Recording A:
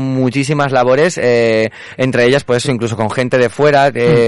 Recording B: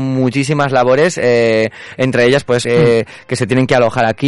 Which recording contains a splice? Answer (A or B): B